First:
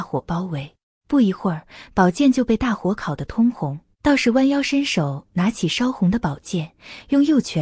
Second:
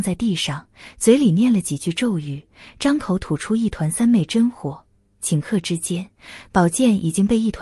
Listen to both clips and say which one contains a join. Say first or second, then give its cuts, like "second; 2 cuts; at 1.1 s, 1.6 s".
first; 2 cuts; at 0.9 s, 3.9 s